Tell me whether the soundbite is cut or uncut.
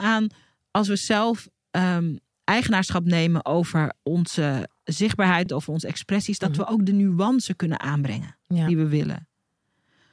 uncut